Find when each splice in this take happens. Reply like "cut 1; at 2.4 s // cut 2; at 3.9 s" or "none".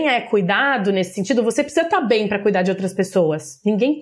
none